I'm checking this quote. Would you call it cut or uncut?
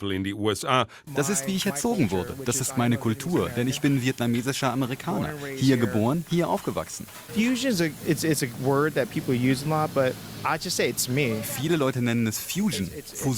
cut